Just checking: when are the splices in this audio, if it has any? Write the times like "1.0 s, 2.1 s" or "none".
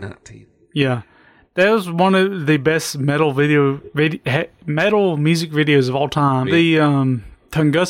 6.4 s